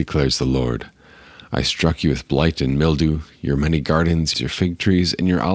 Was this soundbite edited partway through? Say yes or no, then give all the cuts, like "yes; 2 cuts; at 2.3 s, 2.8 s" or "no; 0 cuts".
yes; 1 cut; at 4.3 s